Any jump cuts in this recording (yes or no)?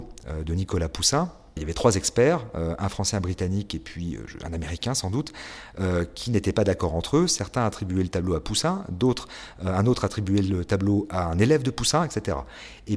no